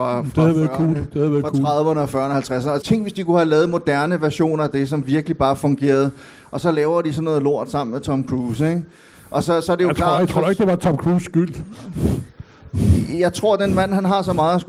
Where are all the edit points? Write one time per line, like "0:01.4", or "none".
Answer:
0:02.8

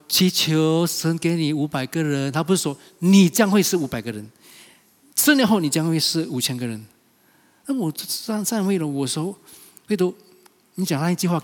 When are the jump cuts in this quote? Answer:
none

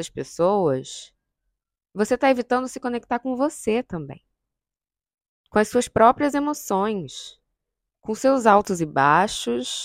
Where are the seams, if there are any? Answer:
none

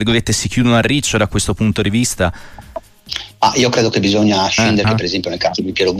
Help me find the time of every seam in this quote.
0:04.8

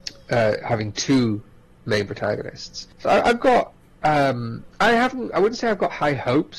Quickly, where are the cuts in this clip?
none

